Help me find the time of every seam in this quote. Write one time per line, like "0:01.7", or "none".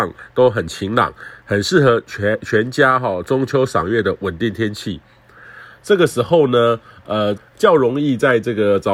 0:05.8
0:07.4